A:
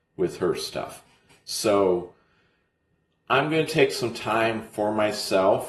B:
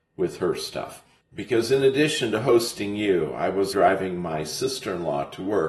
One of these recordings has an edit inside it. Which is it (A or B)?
B